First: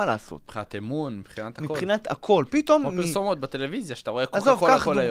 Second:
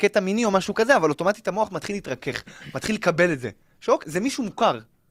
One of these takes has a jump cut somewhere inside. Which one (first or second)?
second